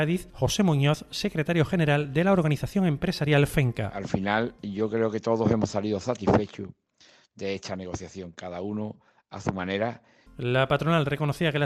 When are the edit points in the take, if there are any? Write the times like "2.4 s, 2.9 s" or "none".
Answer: 10.3 s